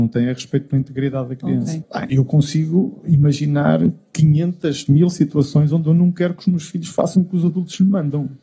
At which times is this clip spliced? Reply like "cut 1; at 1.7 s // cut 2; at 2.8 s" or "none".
cut 1; at 1.8 s